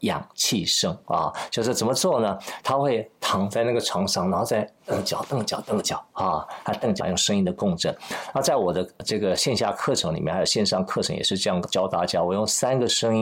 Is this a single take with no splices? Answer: no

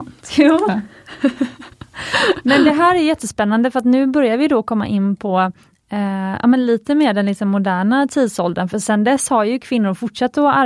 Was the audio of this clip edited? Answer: no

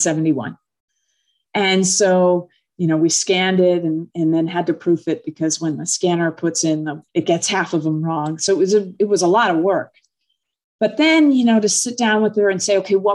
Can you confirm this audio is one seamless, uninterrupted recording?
no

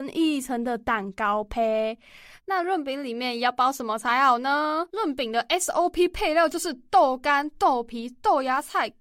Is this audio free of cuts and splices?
no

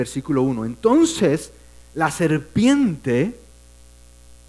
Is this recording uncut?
yes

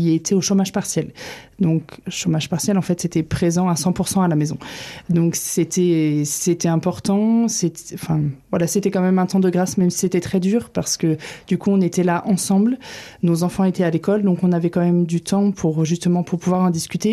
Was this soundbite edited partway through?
no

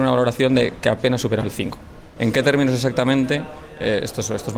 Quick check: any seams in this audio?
yes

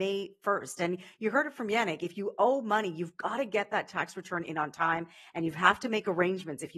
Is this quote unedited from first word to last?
yes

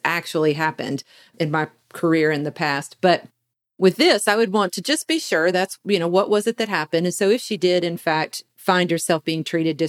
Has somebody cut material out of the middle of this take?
no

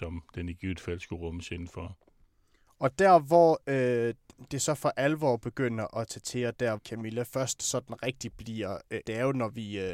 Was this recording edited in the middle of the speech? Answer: yes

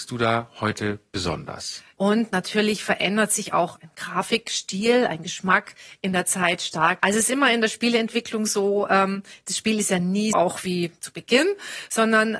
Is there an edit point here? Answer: yes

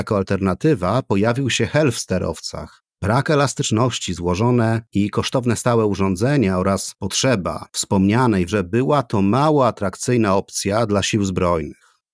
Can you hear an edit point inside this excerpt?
yes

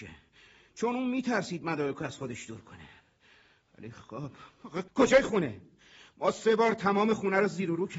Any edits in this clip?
yes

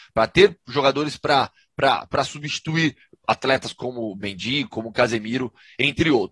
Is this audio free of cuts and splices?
yes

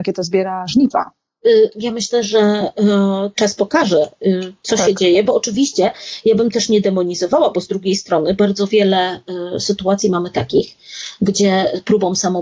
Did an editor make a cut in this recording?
no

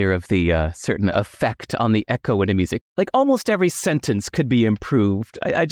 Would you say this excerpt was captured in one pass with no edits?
no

